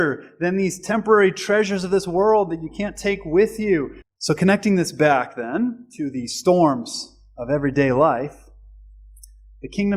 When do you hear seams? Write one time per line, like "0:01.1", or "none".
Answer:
0:04.0